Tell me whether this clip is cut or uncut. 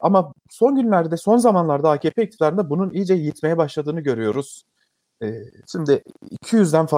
cut